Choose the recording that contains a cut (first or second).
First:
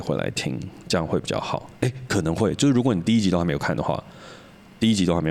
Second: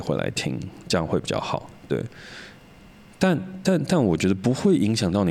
first